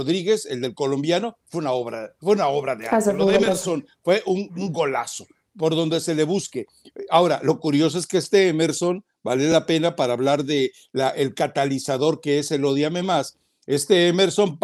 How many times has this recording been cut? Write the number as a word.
zero